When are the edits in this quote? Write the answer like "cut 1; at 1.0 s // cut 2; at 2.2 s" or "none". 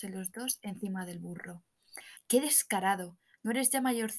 cut 1; at 2.2 s

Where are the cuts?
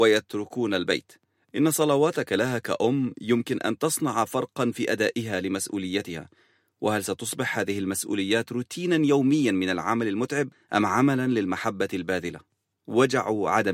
none

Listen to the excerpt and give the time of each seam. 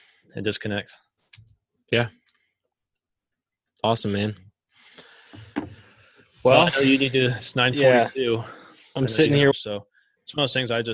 cut 1; at 9.5 s

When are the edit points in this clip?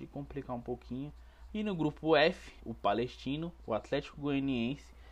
cut 1; at 1.5 s // cut 2; at 2.6 s

